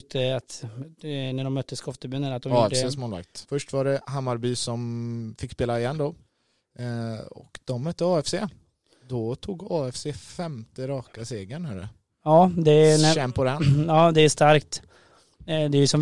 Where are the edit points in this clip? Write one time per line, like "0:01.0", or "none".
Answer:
0:03.4